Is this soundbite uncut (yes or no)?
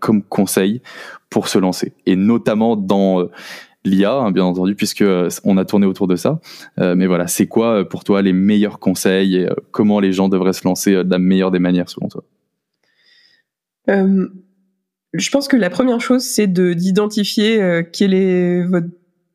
yes